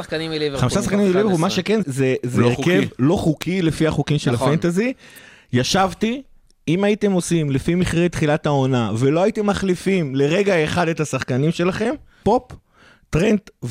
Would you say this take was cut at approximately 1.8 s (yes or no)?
yes